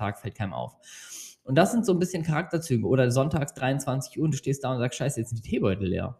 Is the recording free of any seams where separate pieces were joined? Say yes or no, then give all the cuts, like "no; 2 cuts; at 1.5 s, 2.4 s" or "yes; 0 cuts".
yes; 0 cuts